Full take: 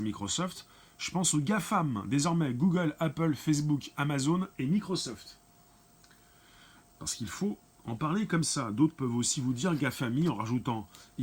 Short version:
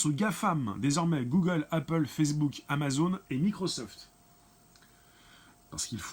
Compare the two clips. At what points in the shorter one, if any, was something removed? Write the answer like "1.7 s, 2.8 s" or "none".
none